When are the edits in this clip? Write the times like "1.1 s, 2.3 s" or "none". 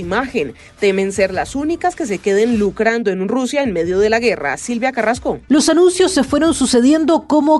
none